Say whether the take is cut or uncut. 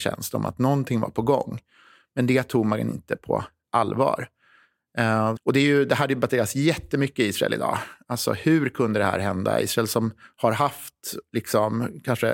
cut